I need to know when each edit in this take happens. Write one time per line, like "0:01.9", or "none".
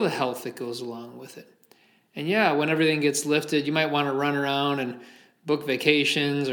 none